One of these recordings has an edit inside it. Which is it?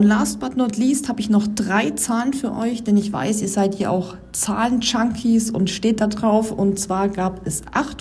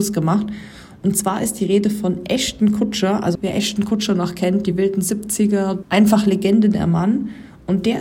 second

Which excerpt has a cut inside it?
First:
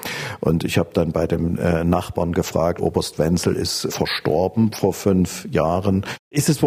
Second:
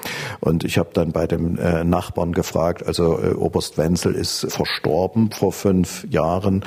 first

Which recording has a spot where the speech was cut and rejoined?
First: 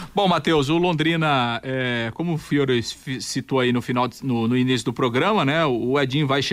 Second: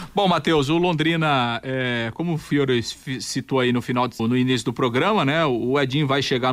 second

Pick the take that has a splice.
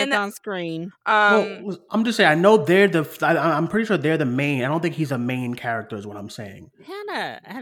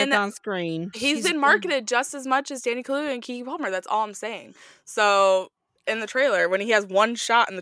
first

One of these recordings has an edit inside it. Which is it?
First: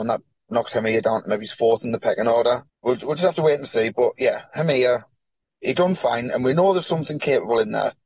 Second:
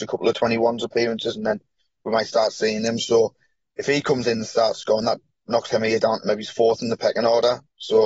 first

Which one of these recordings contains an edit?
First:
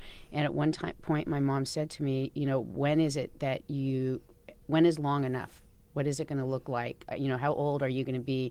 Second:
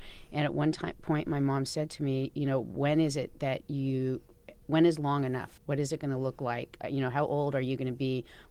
second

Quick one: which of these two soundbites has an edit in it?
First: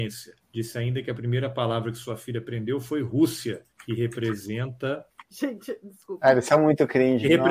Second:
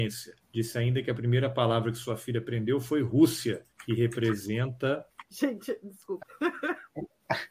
second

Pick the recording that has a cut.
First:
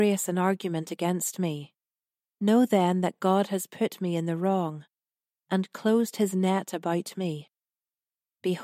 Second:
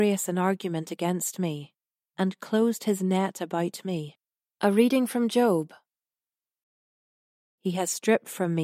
second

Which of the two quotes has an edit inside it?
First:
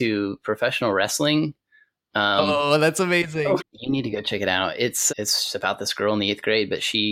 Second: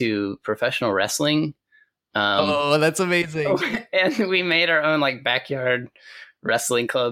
first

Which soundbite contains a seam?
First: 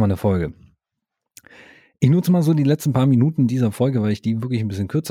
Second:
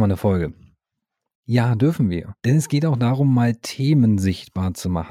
second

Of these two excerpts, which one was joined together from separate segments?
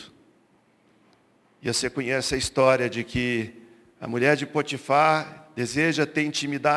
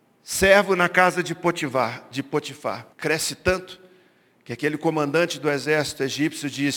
second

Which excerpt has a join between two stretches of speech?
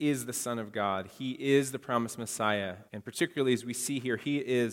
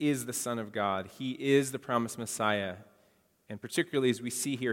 first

